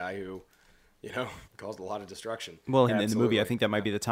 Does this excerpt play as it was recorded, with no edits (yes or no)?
no